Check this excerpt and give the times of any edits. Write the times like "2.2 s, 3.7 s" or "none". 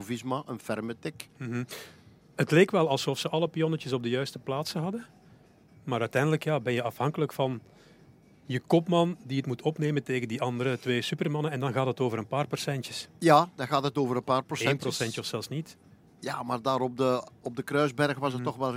none